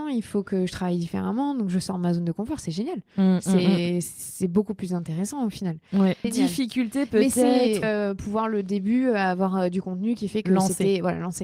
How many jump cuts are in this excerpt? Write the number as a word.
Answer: two